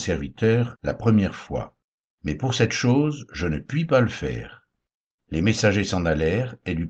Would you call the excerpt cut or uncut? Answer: uncut